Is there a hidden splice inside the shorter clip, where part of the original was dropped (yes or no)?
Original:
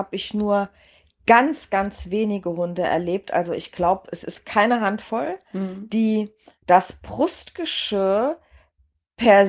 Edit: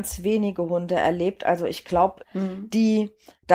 yes